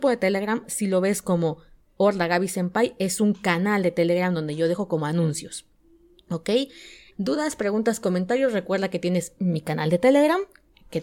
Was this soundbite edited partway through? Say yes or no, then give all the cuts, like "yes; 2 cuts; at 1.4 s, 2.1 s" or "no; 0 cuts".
yes; 1 cut; at 7.1 s